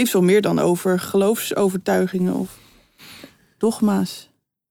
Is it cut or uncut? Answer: uncut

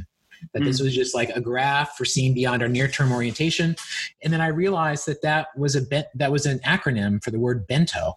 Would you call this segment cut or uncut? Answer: uncut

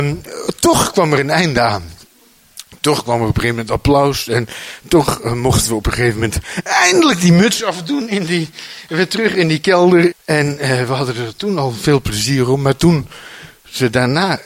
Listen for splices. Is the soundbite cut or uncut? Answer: cut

